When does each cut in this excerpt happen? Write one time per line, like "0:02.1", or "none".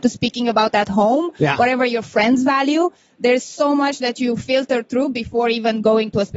none